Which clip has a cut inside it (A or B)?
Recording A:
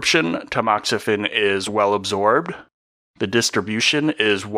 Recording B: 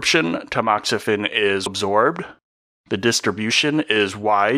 B